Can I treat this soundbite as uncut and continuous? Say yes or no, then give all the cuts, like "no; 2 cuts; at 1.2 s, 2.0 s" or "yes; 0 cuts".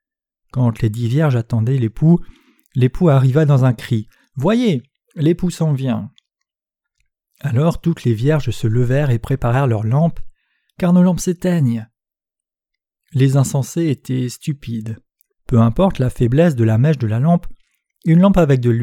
no; 2 cuts; at 10.7 s, 15.3 s